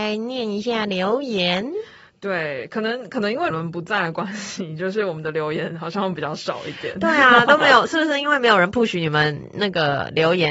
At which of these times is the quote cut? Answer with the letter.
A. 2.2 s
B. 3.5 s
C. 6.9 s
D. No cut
B